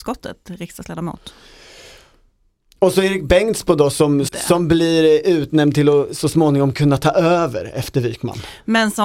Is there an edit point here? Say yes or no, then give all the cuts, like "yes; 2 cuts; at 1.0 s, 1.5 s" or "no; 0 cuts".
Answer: yes; 1 cut; at 4.3 s